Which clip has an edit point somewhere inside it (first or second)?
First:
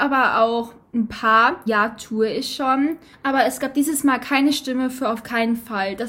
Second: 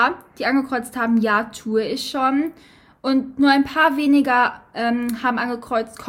first